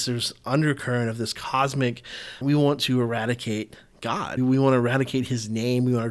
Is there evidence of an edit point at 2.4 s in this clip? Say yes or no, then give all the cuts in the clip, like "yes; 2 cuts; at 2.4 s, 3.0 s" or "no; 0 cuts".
yes; 2 cuts; at 2.4 s, 4.4 s